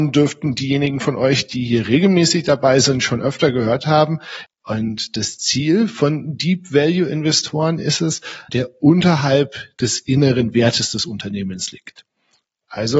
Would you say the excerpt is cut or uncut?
cut